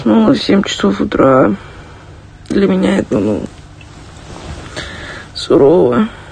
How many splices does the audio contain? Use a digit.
1